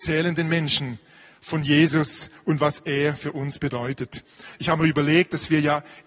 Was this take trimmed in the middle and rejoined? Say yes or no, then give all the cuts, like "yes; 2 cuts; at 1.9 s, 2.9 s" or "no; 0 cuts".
yes; 1 cut; at 4.5 s